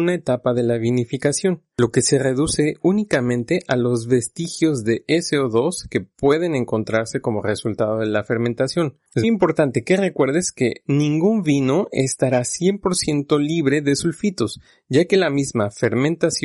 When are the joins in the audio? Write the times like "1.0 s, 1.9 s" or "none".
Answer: 9.2 s